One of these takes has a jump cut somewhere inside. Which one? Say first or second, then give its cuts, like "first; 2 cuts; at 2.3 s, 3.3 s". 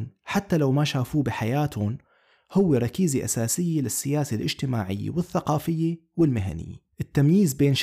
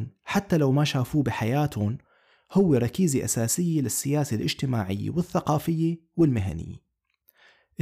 first; 1 cut; at 6.9 s